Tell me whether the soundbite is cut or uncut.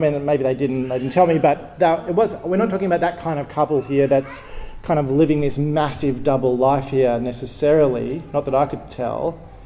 uncut